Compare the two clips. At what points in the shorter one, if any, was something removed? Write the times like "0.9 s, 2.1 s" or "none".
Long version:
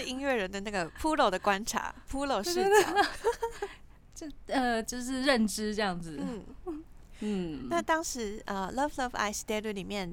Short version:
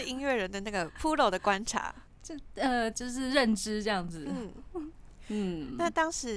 2.1 s

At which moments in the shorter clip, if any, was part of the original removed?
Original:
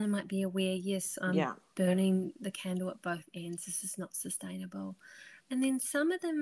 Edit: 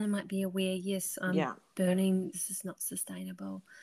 2.3 s

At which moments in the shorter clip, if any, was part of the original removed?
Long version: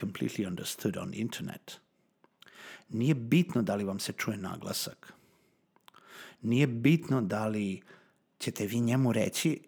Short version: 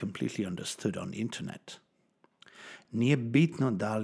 2.8 s

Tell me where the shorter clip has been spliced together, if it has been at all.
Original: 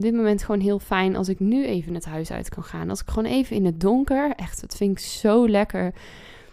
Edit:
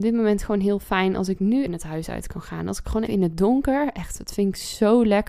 1.7 s, 3.1 s

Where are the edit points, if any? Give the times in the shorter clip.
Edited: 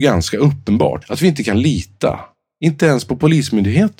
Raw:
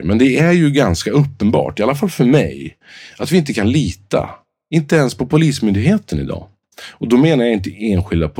1.0 s

